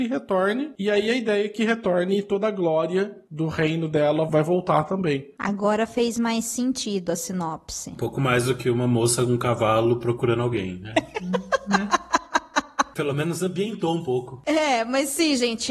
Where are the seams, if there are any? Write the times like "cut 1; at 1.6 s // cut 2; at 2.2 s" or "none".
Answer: none